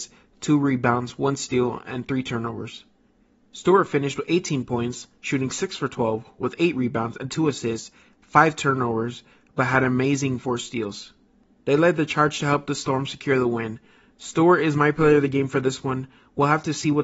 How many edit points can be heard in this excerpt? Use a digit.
0